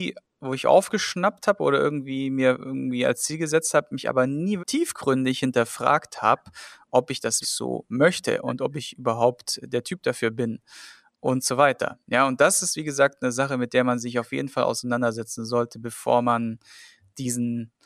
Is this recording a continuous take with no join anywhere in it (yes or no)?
no